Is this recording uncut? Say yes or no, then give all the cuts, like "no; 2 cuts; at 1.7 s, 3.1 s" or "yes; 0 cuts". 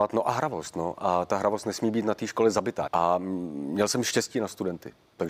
no; 1 cut; at 2.9 s